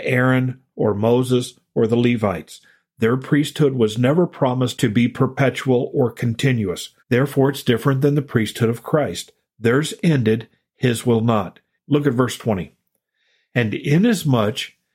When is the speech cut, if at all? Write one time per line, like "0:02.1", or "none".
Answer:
0:07.0
0:11.8